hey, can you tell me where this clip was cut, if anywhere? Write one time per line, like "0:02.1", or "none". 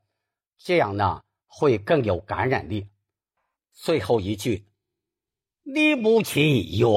none